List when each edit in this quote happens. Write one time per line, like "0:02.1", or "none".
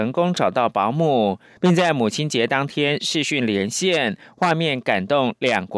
none